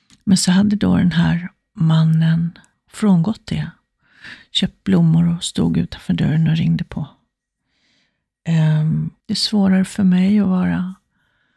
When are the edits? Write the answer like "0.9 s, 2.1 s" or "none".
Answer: 2.7 s, 9.2 s